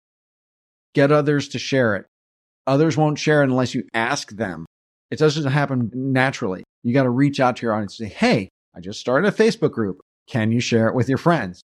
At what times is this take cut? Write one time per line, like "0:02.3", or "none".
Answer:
0:10.1